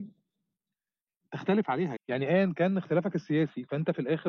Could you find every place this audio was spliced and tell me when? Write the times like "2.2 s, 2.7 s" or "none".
2.0 s